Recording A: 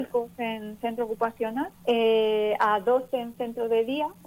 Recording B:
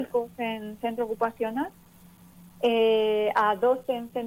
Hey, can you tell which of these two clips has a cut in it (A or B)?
A